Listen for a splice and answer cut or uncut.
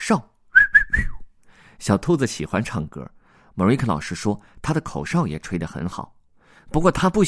uncut